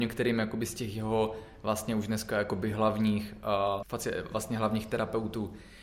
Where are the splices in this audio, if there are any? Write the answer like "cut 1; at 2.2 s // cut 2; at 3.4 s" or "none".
cut 1; at 3.8 s